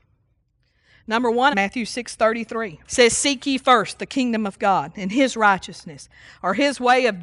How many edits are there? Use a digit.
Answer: 2